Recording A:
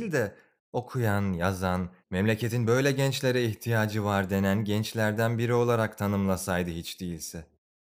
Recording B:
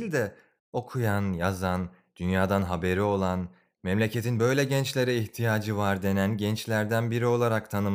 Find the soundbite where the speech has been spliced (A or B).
A